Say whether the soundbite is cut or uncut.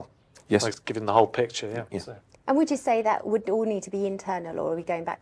uncut